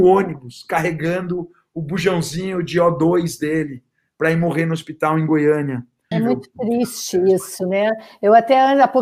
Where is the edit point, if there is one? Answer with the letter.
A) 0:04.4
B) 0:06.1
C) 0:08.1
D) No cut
B